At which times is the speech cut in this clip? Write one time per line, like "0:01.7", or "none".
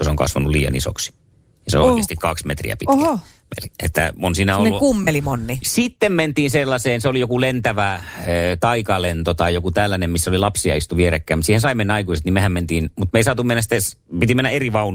0:05.6

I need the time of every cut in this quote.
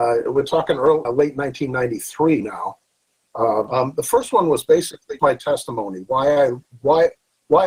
0:01.0
0:03.7
0:05.2

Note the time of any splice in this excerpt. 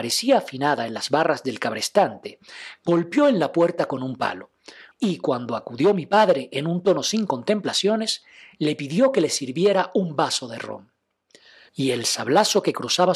0:04.9
0:11.7

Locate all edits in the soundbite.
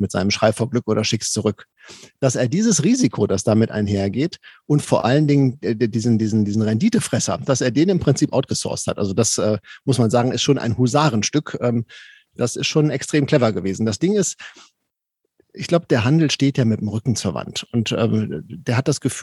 none

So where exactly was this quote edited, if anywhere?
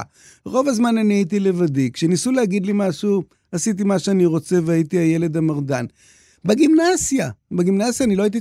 none

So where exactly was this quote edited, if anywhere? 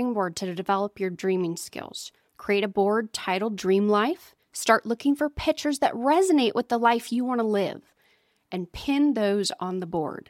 none

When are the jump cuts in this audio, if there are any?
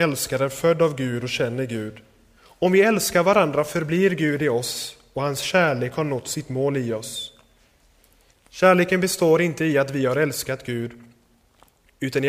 0:02.4
0:08.3

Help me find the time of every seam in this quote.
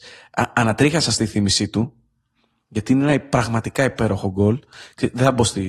none

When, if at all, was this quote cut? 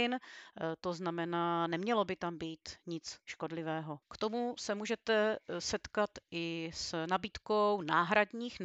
0:04.0

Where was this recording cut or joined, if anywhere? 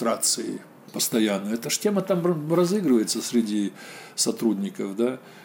none

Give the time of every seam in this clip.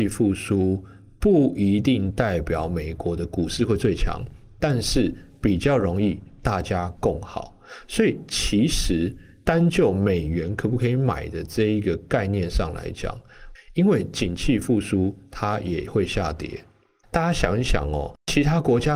0:13.5
0:17.0

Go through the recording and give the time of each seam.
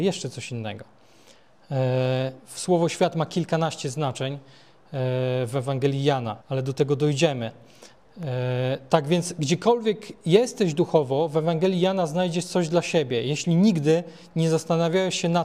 0:06.4

